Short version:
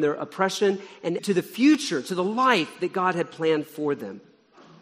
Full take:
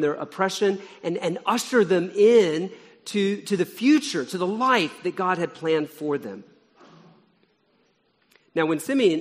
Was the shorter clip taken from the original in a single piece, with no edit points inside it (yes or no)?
no